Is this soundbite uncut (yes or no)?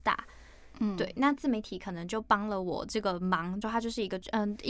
no